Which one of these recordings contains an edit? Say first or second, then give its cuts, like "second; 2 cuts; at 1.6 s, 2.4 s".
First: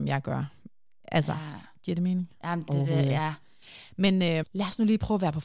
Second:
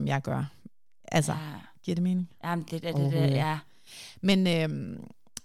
first; 2 cuts; at 2.7 s, 4.4 s